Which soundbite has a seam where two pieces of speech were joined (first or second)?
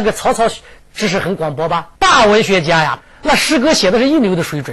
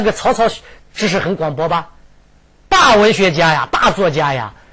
first